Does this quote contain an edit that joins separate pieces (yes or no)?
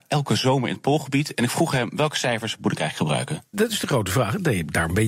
yes